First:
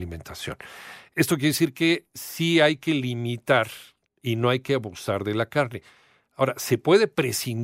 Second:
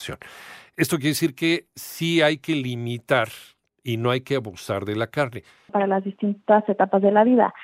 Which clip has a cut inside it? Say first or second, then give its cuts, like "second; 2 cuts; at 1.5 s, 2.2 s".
second; 1 cut; at 5.7 s